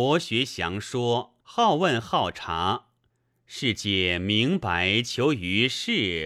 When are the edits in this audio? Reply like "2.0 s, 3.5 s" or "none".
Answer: 1.4 s